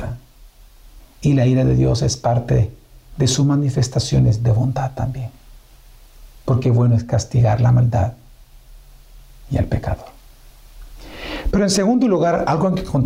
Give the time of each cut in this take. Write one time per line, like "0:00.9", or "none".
none

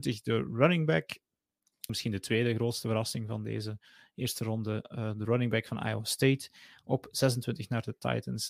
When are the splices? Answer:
0:01.9

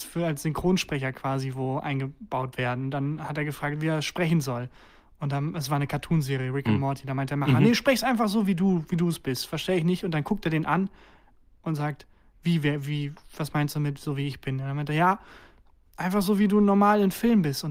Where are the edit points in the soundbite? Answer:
none

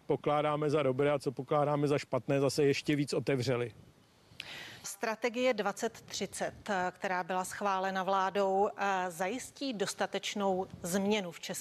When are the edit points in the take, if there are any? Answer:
0:04.8

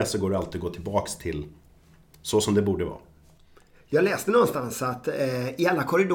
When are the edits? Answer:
none

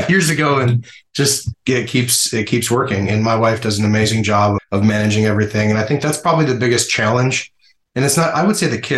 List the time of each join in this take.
0:01.5
0:04.6

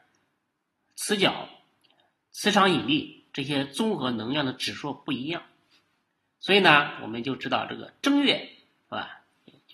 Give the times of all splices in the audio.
none

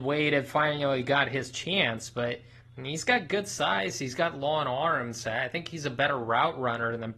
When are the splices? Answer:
none

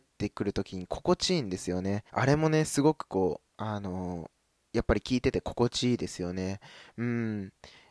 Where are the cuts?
0:02.1
0:03.5

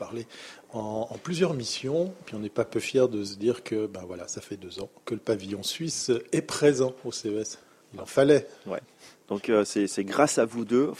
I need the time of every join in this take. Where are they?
0:02.2

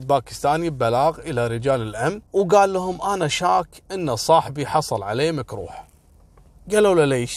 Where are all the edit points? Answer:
0:02.3

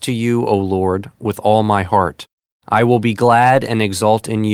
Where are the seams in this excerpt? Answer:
0:02.5

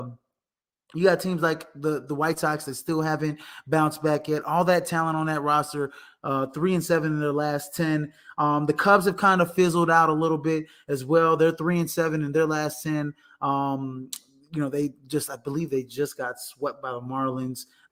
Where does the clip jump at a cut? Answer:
none

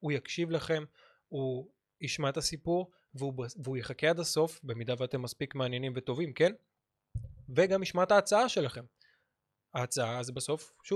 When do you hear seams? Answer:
none

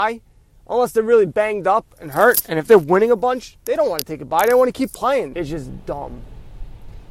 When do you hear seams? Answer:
0:05.3

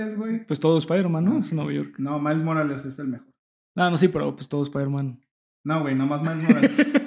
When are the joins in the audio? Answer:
none

